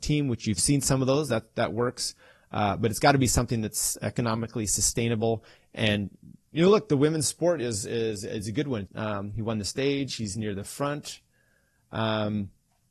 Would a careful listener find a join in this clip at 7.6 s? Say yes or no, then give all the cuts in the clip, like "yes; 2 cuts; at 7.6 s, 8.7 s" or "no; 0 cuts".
no; 1 cut; at 8.9 s